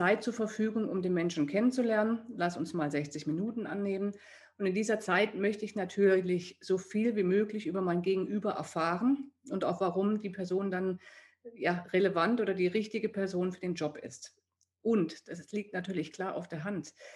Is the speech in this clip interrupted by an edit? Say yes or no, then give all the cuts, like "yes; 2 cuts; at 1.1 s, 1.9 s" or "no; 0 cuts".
no; 0 cuts